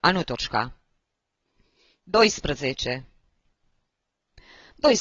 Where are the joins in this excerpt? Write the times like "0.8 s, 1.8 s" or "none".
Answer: none